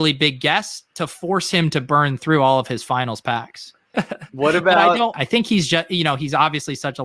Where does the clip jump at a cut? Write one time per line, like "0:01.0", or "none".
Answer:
0:03.9
0:05.1

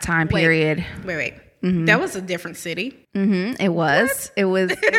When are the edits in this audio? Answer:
0:03.0

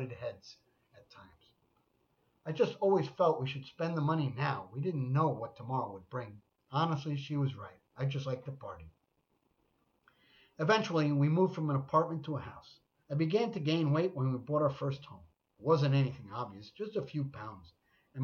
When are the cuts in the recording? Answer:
0:13.0

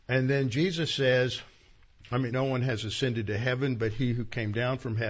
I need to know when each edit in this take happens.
0:02.3

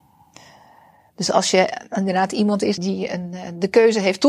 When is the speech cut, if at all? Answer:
0:02.8

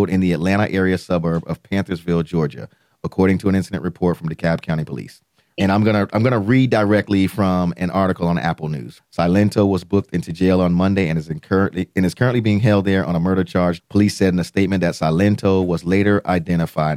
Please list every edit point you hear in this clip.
0:05.6
0:09.0
0:13.8

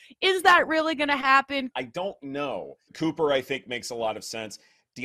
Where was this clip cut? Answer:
0:01.7
0:02.9

